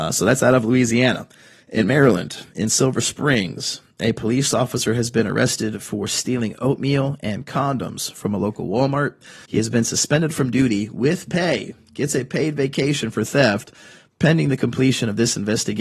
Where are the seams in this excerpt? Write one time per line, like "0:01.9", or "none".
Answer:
0:09.4